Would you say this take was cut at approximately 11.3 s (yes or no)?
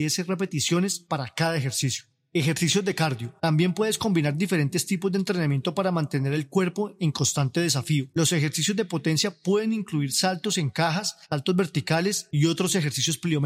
no